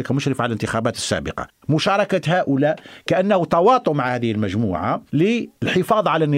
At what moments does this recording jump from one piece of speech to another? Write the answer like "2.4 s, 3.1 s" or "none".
1.6 s